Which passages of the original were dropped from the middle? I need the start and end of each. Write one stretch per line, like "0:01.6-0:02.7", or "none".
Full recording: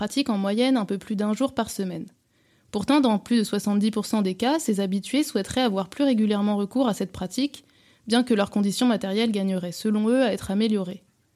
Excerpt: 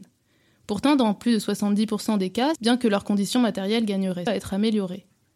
0:04.6-0:08.0
0:09.7-0:10.2